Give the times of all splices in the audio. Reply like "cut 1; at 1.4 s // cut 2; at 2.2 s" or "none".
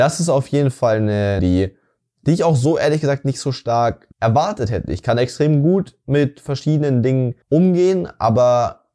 cut 1; at 1.4 s // cut 2; at 4.1 s // cut 3; at 7.4 s